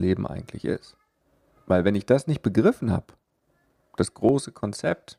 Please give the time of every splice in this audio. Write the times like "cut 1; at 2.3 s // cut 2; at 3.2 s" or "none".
cut 1; at 4.1 s